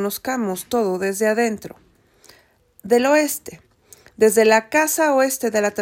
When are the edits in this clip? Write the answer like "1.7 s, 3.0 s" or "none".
none